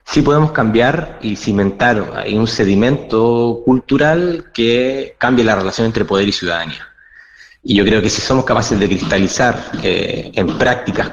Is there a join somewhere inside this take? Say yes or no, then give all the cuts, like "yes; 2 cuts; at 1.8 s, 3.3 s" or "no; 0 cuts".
no; 0 cuts